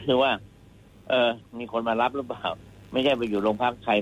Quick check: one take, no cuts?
yes; 0 cuts

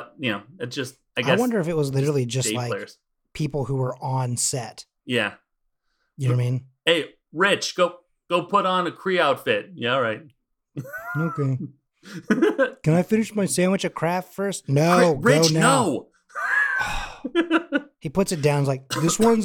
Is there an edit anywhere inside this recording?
no; 0 cuts

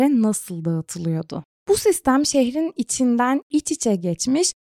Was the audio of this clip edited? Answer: no; 0 cuts

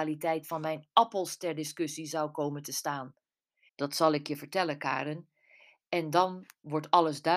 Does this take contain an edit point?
yes; 1 cut; at 3.7 s

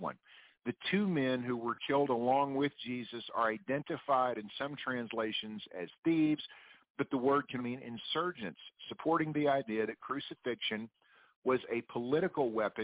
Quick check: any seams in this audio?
yes; 1 cut; at 7.6 s

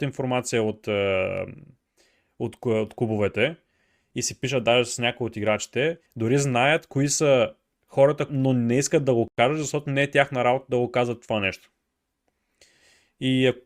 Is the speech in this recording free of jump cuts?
no; 2 cuts; at 6.1 s, 8.3 s

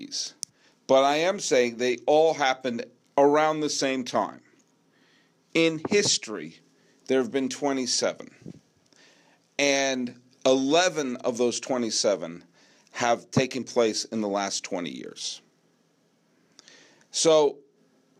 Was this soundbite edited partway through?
no; 0 cuts

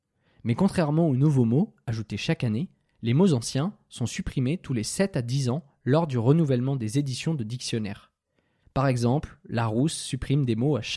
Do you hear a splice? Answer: yes; 1 cut; at 8.6 s

